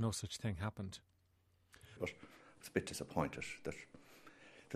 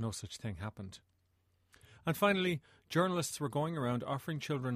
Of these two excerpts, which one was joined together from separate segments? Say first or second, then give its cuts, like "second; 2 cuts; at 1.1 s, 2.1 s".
first; 1 cut; at 2.0 s